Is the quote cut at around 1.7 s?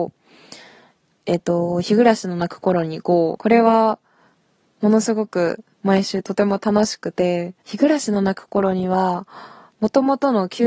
no; 2 cuts; at 3.4 s, 7.6 s

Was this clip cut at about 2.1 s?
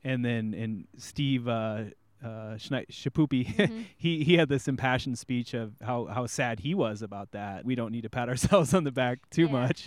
no; 1 cut; at 7.6 s

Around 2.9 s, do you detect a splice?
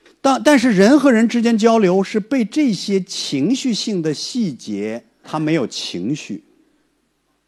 no; 1 cut; at 5.2 s

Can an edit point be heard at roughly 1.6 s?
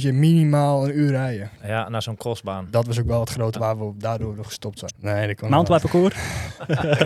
no; 2 cuts; at 3.5 s, 4.9 s

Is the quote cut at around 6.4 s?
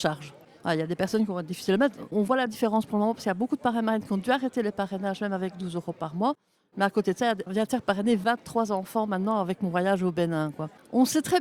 no; 0 cuts

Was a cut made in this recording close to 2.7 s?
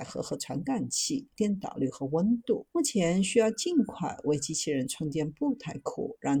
yes; 2 cuts; at 1.3 s, 2.7 s

